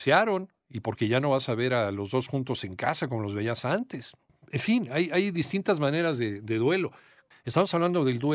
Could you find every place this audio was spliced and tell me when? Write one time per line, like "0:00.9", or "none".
0:07.3